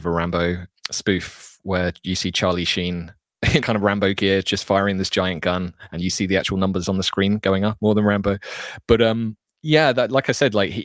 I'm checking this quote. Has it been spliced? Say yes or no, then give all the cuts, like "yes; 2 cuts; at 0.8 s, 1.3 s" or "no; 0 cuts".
yes; 2 cuts; at 3.6 s, 7.8 s